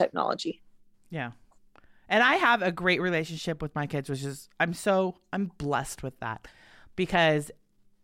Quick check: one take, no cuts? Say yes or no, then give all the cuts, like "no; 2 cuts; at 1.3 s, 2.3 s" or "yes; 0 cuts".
yes; 0 cuts